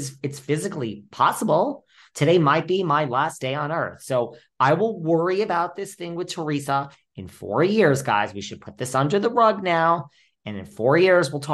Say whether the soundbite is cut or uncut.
uncut